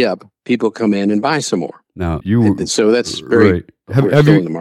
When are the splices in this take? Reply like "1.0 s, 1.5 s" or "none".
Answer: 2.2 s